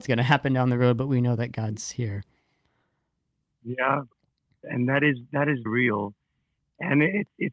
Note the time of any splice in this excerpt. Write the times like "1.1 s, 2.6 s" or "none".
4.6 s, 5.7 s